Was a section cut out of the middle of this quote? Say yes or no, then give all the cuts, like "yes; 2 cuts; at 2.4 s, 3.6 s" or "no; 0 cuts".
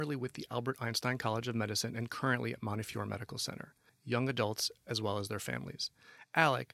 yes; 1 cut; at 3.9 s